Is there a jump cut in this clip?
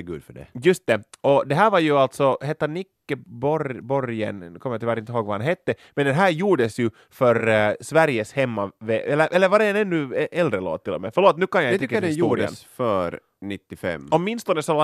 no; 0 cuts

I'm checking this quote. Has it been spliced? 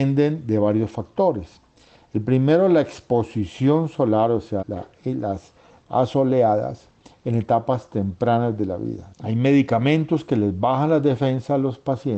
yes; 2 cuts; at 4.6 s, 9.1 s

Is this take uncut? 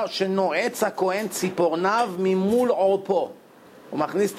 yes; 0 cuts

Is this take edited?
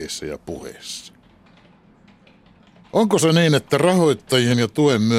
yes; 1 cut; at 2.8 s

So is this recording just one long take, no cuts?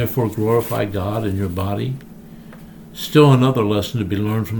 yes; 0 cuts

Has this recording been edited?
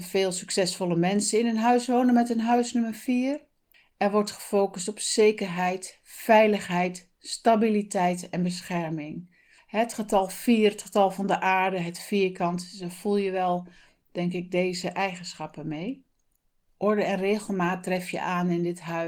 yes; 1 cut; at 16.8 s

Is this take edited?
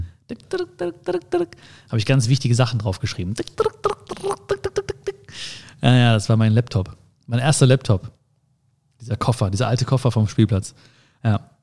no; 0 cuts

